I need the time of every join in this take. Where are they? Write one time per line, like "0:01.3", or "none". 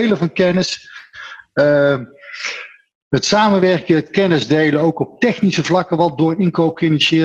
none